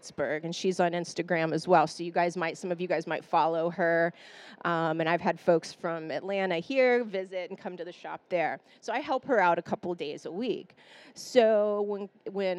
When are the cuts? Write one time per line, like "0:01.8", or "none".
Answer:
none